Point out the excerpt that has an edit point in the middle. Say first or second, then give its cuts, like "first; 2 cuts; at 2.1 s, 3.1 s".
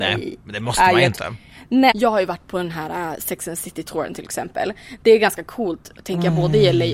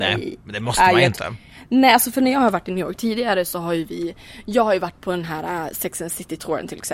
first; 1 cut; at 1.9 s